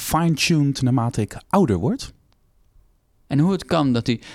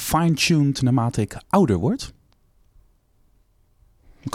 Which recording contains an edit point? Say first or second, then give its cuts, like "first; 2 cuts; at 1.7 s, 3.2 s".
first; 1 cut; at 3.3 s